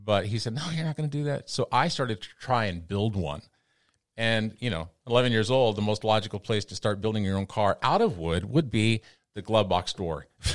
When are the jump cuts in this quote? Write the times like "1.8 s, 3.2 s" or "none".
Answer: none